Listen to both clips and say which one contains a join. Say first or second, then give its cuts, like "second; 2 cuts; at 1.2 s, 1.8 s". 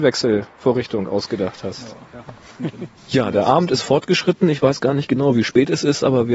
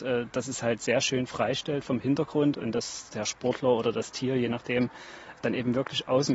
first; 1 cut; at 3.0 s